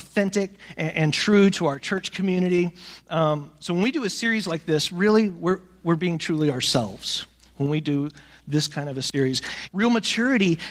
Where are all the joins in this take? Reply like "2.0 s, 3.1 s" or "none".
5.8 s, 9.7 s